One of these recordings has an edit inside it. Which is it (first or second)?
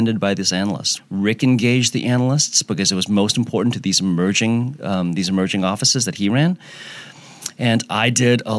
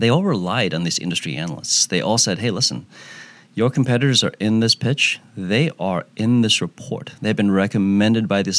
first